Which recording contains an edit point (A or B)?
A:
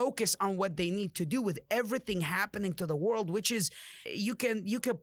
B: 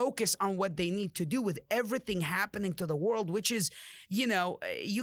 A